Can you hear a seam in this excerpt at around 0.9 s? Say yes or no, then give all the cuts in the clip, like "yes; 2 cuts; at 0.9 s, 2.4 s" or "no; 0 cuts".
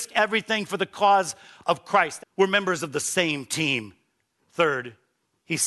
no; 2 cuts; at 2.2 s, 4.4 s